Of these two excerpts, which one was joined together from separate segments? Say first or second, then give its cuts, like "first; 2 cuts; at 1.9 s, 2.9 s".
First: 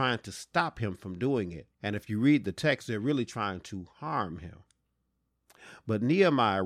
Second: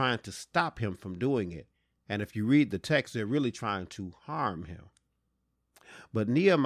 first; 1 cut; at 1.7 s